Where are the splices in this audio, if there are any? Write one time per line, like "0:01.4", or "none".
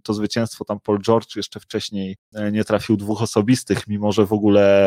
none

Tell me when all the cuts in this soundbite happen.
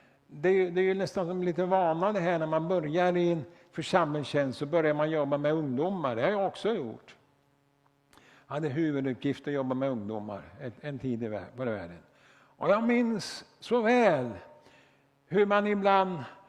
none

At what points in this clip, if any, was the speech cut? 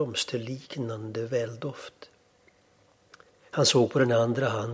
0:03.3

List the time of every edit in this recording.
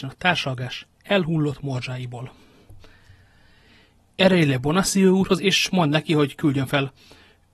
0:05.4

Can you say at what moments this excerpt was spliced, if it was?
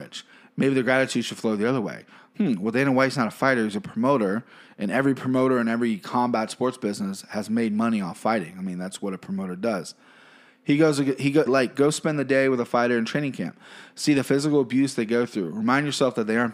0:11.5

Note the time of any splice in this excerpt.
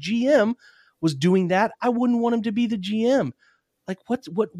none

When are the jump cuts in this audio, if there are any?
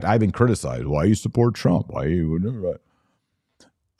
none

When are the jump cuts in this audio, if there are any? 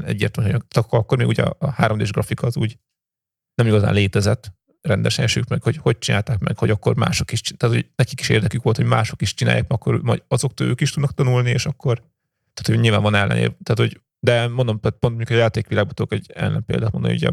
0:14.1

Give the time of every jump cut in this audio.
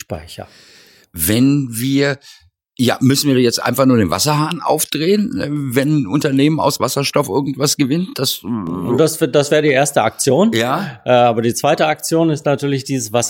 none

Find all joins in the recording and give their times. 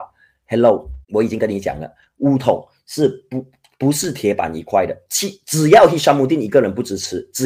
0:01.0

